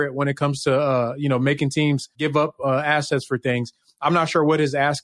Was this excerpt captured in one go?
yes; 0 cuts

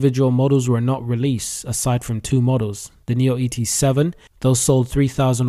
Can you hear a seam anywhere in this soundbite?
no; 0 cuts

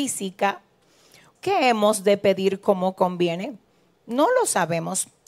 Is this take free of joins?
no; 1 cut; at 1.4 s

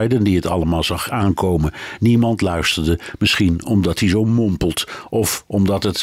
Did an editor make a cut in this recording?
no; 0 cuts

